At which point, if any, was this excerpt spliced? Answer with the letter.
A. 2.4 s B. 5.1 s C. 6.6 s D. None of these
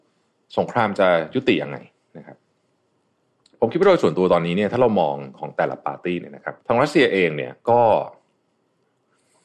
C